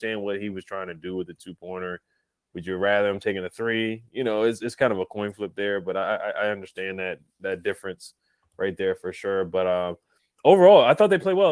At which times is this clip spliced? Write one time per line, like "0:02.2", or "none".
none